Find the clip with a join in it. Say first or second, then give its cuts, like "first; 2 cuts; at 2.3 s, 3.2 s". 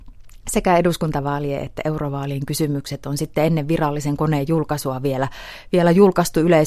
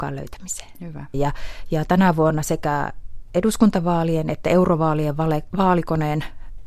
second; 1 cut; at 1.1 s